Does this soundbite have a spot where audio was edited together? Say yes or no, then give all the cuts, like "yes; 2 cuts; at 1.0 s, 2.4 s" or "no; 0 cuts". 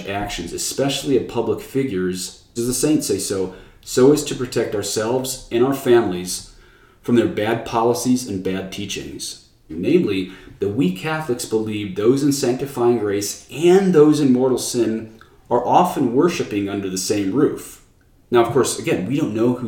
yes; 2 cuts; at 2.6 s, 9.7 s